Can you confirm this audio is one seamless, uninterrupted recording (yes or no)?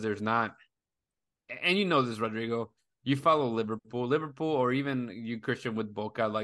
yes